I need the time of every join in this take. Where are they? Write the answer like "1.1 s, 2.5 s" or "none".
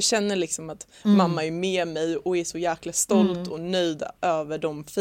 none